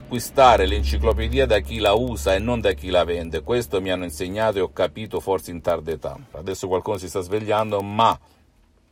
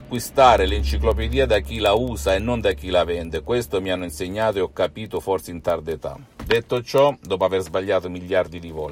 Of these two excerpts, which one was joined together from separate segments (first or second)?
first